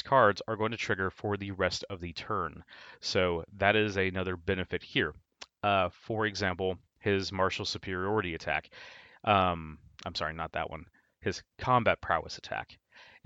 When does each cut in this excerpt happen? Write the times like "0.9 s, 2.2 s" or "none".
none